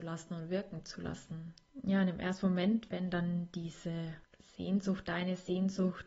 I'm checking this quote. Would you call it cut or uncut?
uncut